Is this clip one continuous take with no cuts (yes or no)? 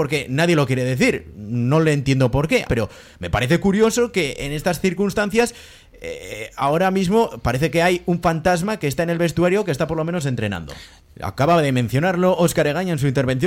no